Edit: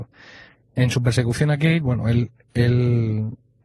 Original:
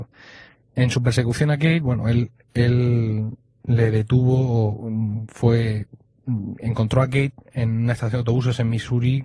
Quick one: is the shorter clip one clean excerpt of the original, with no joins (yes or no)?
yes